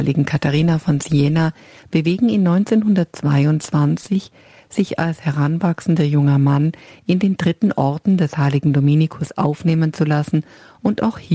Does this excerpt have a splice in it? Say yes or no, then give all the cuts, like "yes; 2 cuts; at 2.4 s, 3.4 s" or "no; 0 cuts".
no; 0 cuts